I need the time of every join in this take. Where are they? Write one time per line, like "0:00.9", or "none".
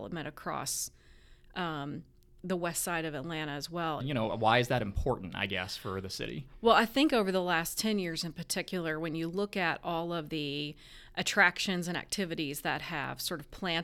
0:04.0